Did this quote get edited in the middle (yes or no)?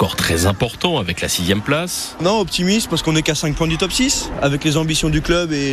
no